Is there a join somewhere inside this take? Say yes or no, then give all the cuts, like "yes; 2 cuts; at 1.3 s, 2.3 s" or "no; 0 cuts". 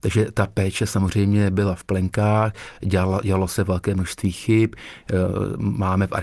no; 0 cuts